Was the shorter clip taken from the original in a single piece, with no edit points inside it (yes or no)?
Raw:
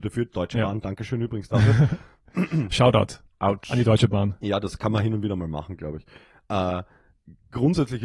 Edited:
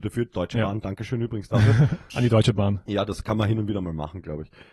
no